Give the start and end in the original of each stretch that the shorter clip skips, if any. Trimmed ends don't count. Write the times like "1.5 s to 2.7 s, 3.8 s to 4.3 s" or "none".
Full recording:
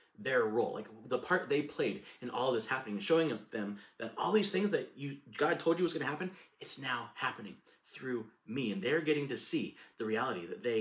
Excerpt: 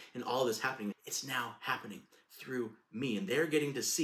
3.0 s to 6.5 s